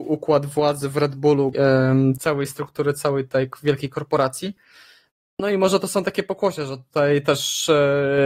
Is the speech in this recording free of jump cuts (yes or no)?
no